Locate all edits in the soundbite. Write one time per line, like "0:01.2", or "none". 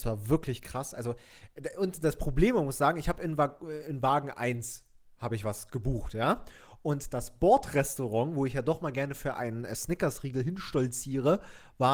none